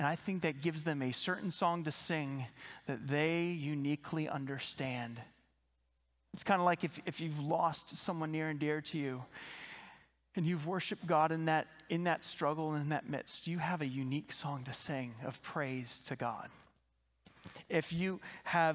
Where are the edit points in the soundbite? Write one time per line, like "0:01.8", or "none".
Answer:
none